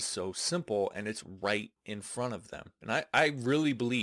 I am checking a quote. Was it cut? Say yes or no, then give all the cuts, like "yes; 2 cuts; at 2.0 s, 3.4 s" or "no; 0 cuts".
yes; 1 cut; at 2.8 s